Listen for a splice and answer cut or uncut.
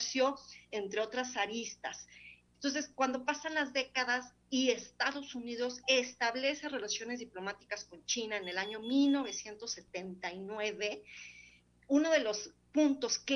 cut